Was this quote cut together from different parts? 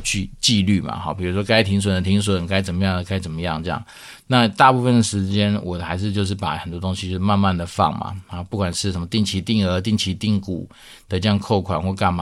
no; 0 cuts

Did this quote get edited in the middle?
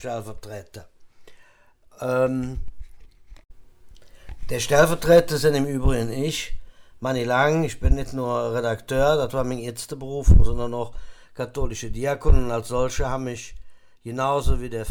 no; 0 cuts

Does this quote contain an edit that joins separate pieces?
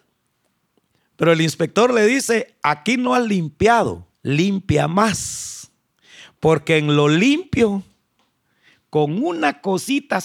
yes; 1 cut; at 4.1 s

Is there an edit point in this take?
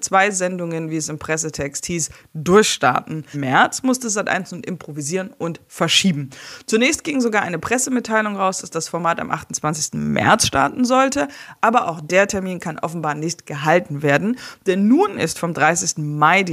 yes; 1 cut; at 3.3 s

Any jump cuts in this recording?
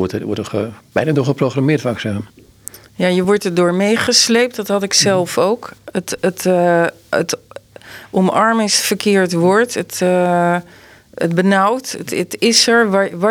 no; 0 cuts

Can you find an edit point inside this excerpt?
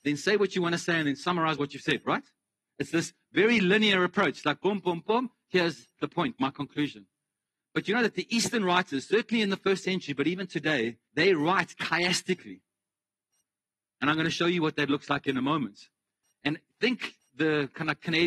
yes; 1 cut; at 11.0 s

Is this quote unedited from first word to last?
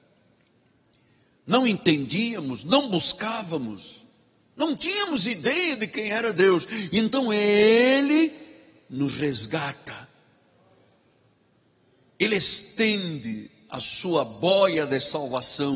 yes; 0 cuts

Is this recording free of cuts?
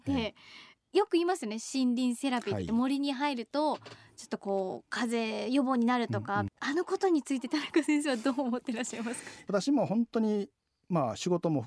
no; 1 cut; at 6.5 s

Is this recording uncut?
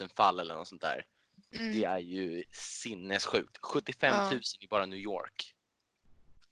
yes; 0 cuts

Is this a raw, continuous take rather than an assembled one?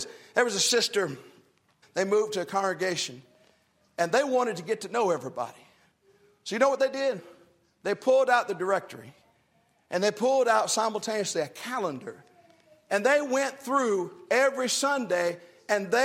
no; 1 cut; at 1.8 s

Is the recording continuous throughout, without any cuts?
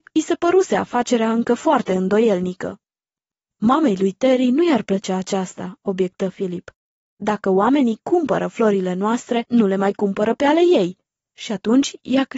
yes; 0 cuts

